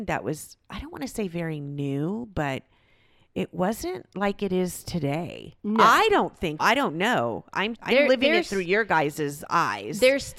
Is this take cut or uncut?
cut